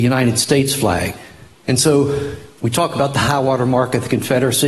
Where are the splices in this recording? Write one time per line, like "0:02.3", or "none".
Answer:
0:01.6